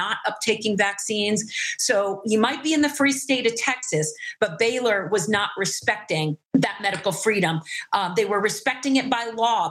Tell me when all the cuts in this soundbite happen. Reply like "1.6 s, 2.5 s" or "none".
6.4 s